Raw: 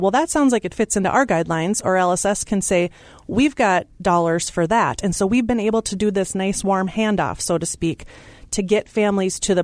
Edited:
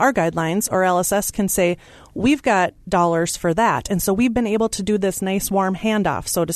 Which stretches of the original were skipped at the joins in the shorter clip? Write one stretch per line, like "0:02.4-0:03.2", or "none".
none